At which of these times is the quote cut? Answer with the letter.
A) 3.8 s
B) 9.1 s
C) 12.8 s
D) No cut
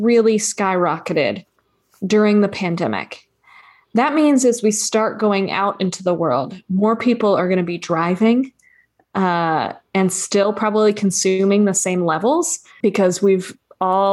C